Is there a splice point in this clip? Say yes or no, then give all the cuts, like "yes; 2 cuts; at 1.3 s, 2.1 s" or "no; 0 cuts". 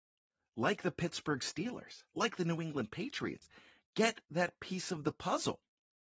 no; 0 cuts